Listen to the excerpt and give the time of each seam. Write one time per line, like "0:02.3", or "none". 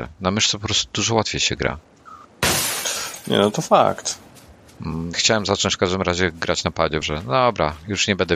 0:05.1
0:07.0